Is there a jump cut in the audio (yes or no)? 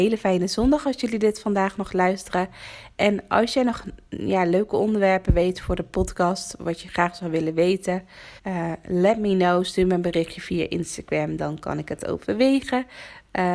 yes